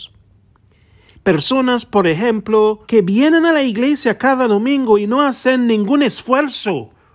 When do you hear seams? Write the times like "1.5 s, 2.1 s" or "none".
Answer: 1.1 s, 2.8 s